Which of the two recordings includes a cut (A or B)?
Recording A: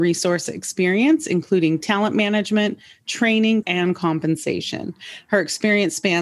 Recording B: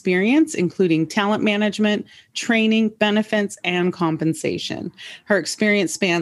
A